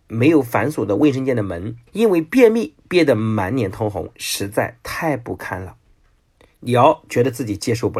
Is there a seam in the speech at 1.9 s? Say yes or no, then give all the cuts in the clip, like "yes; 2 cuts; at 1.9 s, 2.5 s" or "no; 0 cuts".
yes; 1 cut; at 1.9 s